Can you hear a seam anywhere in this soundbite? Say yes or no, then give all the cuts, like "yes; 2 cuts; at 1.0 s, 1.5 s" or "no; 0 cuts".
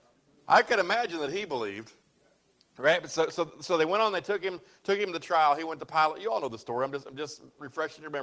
no; 0 cuts